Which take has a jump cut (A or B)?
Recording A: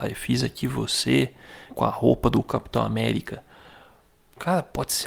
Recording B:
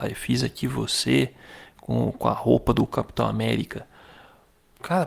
A